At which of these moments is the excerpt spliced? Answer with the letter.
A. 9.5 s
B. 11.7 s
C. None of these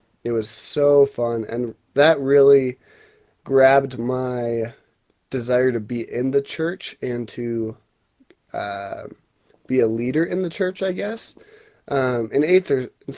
C